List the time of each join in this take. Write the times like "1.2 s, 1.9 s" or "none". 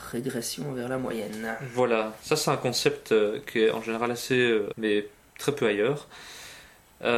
4.7 s